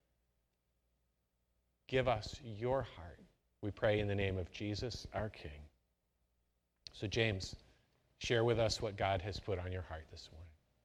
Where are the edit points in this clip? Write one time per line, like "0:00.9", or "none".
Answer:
none